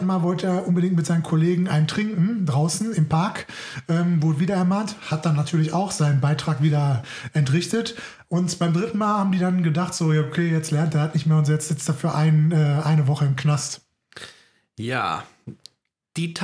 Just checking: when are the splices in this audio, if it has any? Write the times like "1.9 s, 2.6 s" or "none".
none